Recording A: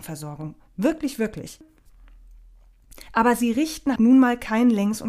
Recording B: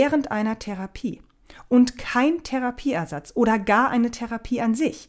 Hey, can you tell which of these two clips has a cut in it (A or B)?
A